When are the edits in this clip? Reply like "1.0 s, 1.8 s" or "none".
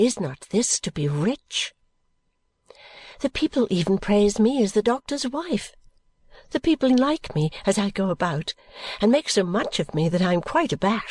6.9 s